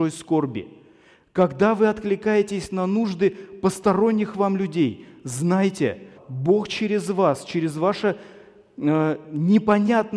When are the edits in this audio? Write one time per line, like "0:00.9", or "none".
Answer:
0:06.1